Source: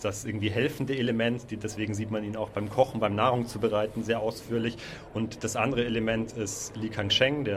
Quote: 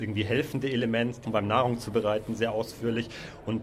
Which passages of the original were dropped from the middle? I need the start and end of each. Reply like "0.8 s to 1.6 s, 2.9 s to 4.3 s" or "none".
1.5 s to 2.9 s